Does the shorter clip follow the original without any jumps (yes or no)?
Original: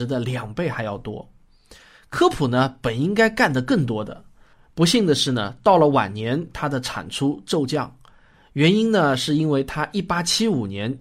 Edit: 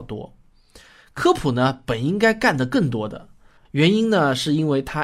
no